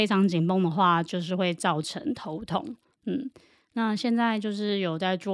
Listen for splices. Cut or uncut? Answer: cut